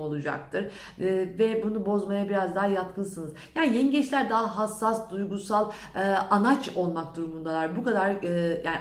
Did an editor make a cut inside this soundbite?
no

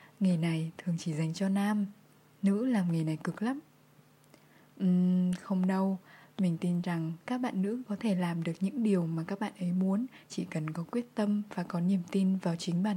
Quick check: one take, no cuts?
yes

